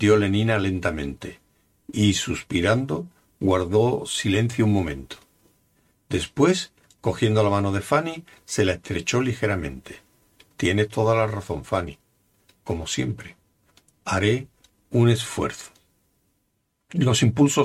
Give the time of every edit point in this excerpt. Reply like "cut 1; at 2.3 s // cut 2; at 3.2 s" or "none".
none